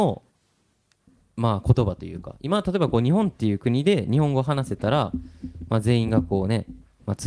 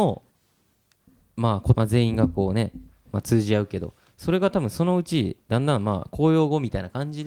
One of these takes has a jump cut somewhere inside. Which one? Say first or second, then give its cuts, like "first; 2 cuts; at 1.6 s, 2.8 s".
second; 1 cut; at 1.7 s